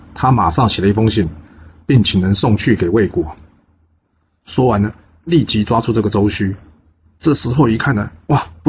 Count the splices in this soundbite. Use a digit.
1